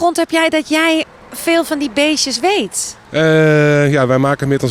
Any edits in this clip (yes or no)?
no